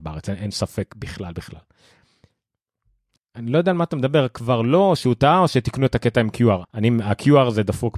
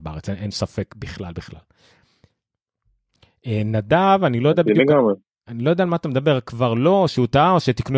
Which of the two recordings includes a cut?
first; 2 cuts; at 3.2 s, 6.6 s

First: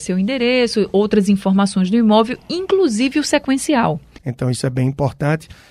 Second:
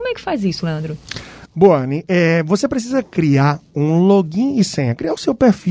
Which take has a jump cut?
first; 1 cut; at 4.2 s

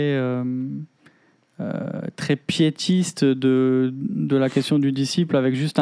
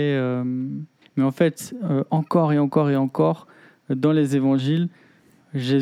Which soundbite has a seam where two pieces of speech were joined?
second; 1 cut; at 1.0 s

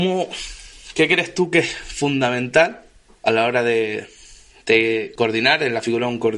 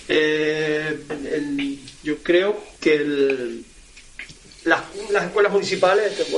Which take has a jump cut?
second; 2 cuts; at 1.1 s, 2.8 s

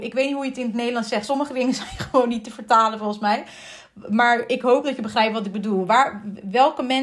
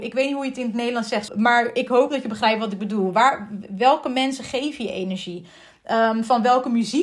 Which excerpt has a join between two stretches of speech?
second; 1 cut; at 1.3 s

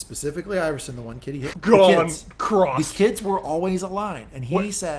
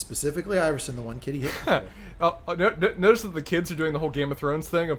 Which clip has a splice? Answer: first; 1 cut; at 1.5 s

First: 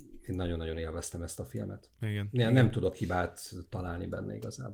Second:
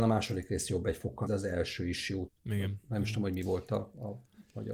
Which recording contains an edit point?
second; 2 cuts; at 1.3 s, 2.3 s

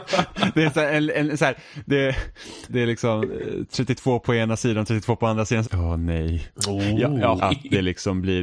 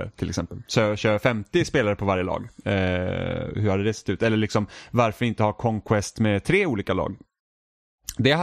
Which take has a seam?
first; 3 cuts; at 2.7 s, 5.6 s, 7.4 s

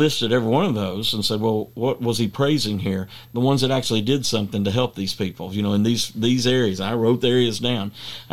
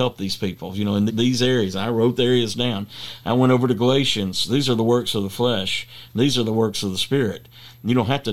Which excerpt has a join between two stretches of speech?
second; 1 cut; at 1.1 s

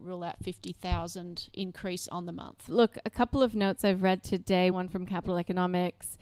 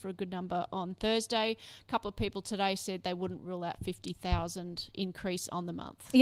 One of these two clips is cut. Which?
first; 2 cuts; at 2.7 s, 4.7 s

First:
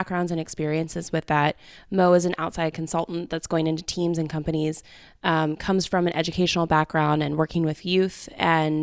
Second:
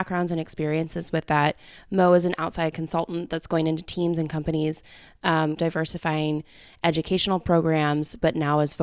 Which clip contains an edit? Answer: second; 1 cut; at 5.6 s

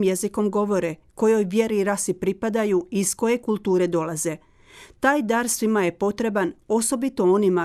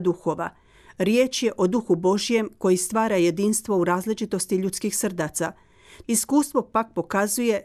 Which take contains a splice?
second; 1 cut; at 6.0 s

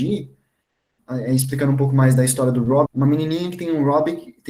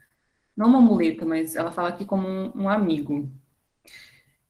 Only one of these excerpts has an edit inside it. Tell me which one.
first; 2 cuts; at 1.0 s, 2.9 s

